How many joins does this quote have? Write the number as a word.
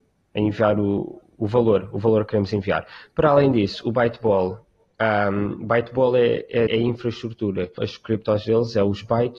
two